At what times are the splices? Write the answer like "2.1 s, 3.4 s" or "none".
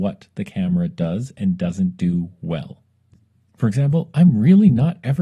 none